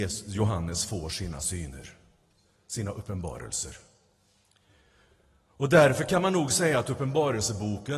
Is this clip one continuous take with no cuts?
yes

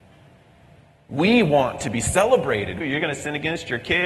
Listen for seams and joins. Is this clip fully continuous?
no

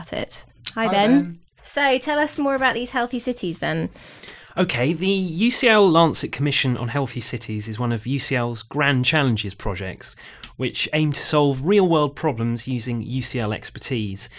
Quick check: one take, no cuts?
no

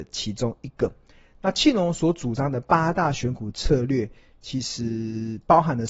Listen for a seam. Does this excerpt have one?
no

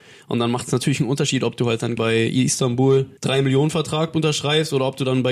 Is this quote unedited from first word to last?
no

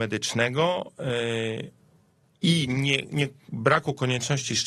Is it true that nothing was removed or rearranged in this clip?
yes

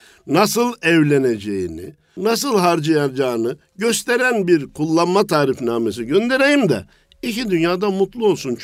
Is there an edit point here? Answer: yes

